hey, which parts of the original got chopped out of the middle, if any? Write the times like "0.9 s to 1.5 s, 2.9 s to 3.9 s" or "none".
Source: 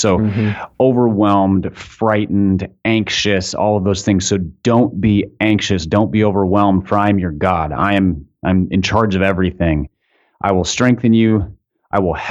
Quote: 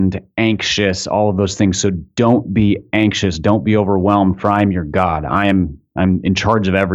none